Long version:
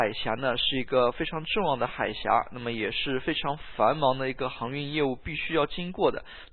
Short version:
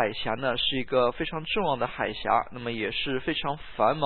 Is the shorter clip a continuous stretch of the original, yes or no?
yes